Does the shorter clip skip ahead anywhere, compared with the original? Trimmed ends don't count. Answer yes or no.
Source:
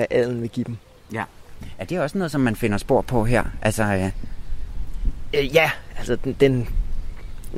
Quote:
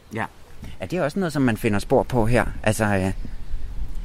no